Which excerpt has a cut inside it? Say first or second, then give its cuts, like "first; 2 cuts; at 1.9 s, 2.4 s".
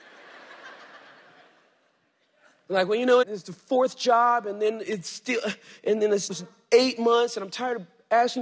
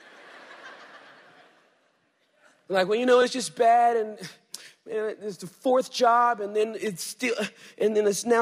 first; 2 cuts; at 3.2 s, 6.3 s